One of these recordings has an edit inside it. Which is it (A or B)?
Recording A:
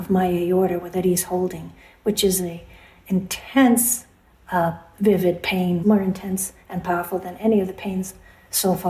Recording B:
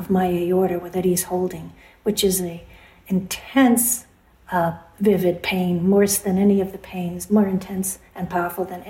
A